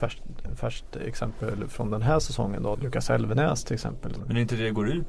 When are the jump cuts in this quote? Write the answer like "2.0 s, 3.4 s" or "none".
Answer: 2.7 s, 4.2 s